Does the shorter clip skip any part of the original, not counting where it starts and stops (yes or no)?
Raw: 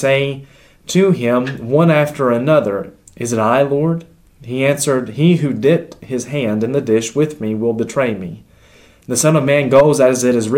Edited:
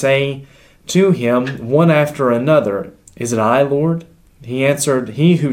no